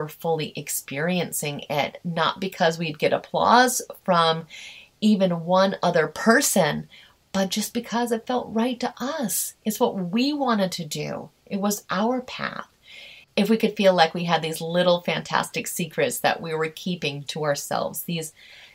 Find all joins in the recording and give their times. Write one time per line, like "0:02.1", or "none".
0:13.2
0:17.3